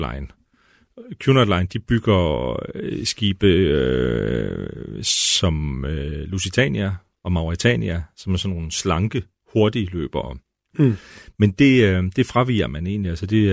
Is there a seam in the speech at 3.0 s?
no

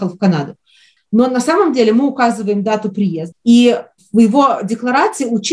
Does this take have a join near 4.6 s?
no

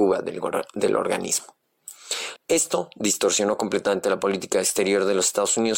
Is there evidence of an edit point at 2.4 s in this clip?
yes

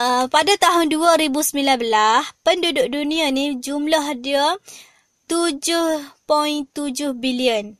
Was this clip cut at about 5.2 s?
yes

